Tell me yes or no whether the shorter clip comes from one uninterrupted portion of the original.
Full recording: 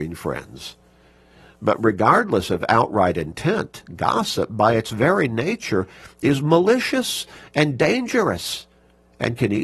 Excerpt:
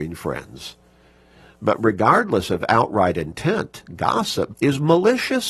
no